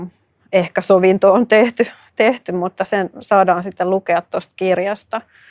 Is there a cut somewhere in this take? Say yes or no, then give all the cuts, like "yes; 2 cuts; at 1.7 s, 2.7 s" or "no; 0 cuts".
no; 0 cuts